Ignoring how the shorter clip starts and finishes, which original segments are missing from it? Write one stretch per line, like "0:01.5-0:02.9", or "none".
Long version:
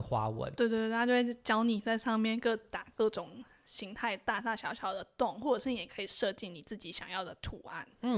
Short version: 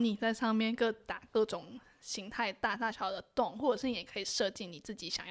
0:04.6-0:04.7

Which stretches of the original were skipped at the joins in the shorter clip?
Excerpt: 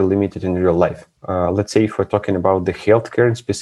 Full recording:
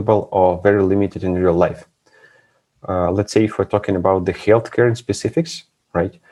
0:02.0-0:02.8

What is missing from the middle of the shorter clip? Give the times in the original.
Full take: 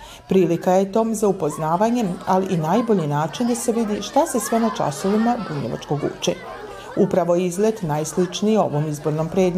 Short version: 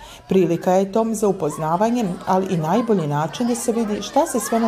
none

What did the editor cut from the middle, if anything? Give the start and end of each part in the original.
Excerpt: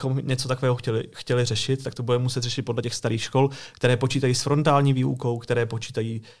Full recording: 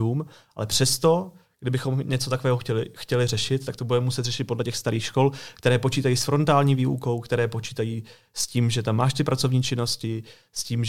none

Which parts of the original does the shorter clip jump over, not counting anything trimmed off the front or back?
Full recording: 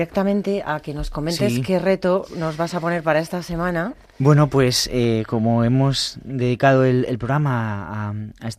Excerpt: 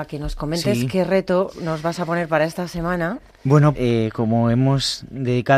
0:04.5-0:04.9

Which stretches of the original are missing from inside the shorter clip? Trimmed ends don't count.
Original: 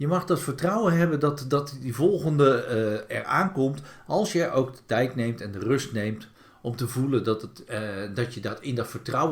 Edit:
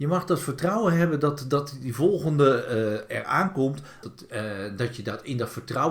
0:04.0-0:07.4

